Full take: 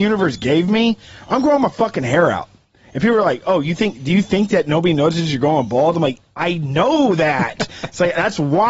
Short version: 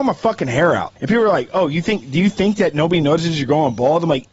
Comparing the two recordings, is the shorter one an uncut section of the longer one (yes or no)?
no